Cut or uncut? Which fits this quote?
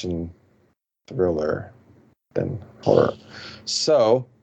uncut